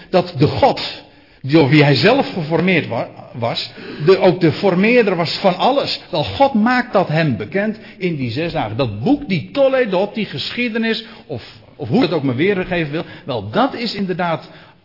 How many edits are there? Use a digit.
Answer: 1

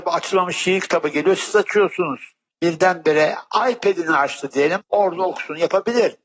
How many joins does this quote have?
1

